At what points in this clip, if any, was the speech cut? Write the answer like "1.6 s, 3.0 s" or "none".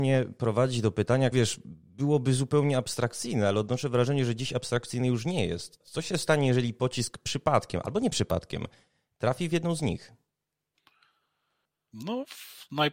1.3 s, 5.8 s